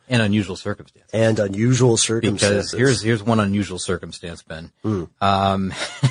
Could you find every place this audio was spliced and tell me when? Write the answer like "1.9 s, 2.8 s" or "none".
none